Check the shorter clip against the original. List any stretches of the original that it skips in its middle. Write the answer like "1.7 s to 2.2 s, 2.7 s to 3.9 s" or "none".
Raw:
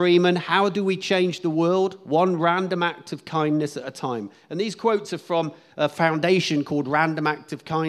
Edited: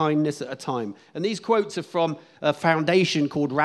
none